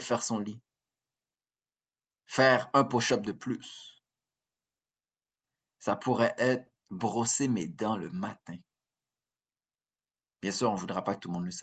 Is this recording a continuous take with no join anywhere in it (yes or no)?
yes